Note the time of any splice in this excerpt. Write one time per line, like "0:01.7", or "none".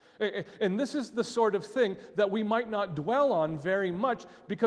none